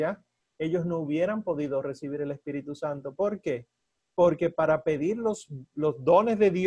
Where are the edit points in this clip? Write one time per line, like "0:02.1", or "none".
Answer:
none